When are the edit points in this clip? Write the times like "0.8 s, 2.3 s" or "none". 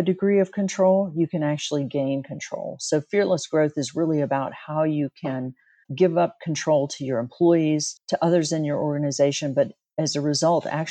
7.9 s